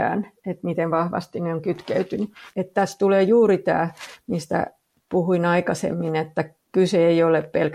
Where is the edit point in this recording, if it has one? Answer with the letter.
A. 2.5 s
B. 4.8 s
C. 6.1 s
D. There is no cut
A